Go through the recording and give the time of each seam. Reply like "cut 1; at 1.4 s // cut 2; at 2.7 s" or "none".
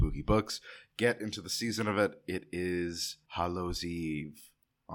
cut 1; at 3.3 s